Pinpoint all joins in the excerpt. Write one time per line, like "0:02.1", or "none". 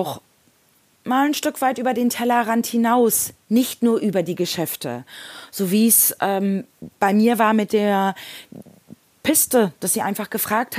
none